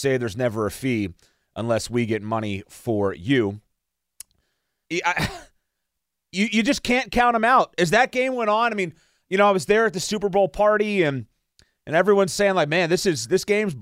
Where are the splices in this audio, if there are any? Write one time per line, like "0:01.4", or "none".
0:04.9